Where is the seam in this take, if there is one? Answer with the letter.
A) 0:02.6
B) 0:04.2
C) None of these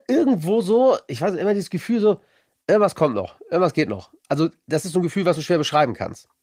C